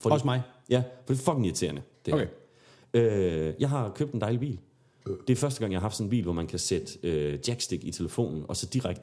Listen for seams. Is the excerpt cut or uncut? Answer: uncut